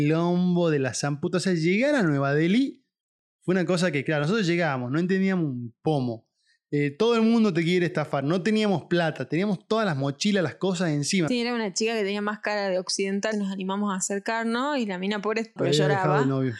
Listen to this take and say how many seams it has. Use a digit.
3